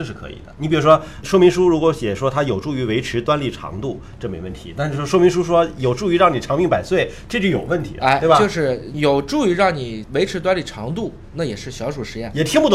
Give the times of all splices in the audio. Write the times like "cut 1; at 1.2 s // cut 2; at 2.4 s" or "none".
none